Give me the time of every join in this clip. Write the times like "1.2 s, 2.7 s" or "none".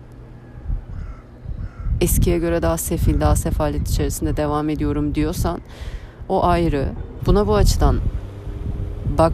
7.2 s